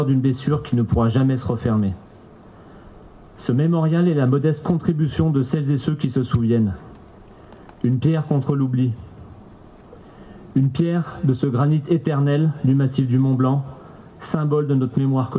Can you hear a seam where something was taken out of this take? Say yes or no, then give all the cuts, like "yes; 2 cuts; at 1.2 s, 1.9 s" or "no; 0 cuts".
no; 0 cuts